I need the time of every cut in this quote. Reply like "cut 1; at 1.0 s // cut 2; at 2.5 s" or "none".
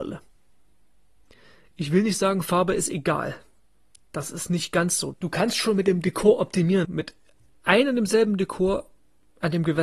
cut 1; at 5.1 s // cut 2; at 6.8 s